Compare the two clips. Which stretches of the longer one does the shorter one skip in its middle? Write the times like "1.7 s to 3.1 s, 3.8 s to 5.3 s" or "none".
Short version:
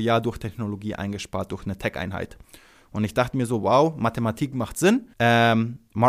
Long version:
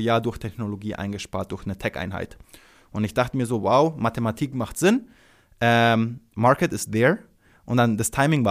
5.1 s to 5.5 s

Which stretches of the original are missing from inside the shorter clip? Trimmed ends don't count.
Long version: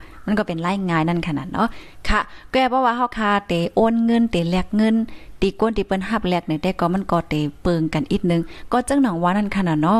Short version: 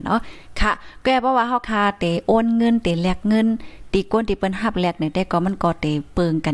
none

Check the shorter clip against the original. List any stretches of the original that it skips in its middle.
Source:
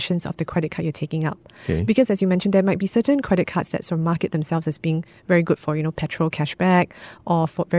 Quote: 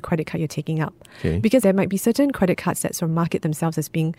2.1 s to 2.5 s

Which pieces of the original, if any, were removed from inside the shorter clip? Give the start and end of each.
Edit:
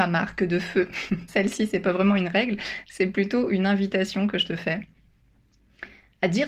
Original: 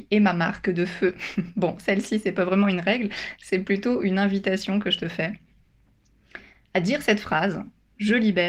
1.5 s to 1.8 s

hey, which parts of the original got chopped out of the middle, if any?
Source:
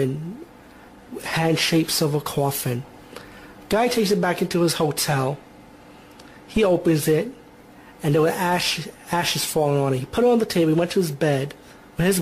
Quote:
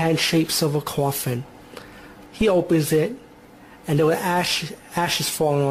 3.7 s to 6.4 s

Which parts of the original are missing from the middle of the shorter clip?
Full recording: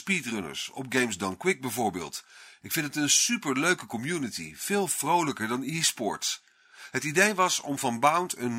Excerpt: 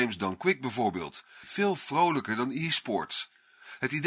2.4 s to 4.6 s

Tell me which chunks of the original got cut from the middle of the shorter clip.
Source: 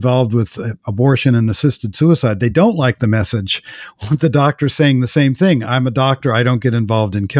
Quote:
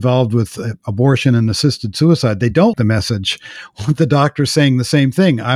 2.7 s to 3.0 s

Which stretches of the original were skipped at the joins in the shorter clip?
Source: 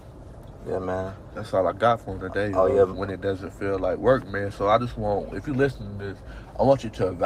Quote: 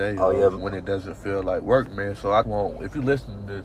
4.8 s to 4.9 s

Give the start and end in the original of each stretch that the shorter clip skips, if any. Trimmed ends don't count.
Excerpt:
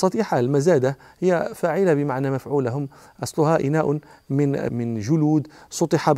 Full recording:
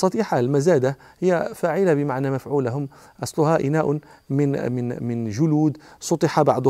4.7 s to 5.0 s

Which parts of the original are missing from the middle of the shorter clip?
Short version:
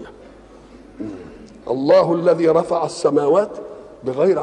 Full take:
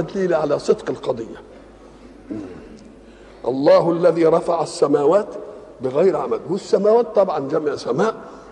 2.9 s to 3.4 s

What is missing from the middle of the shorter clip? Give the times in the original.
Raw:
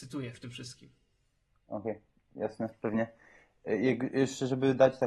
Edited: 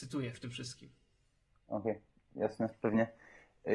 none

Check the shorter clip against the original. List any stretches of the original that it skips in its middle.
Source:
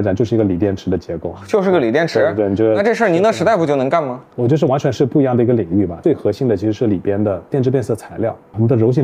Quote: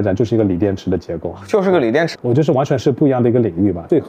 2.1 s to 4.3 s

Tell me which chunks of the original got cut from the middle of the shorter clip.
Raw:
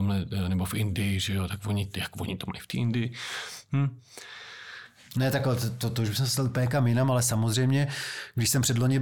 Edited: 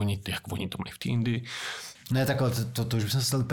3.6 s to 5.0 s

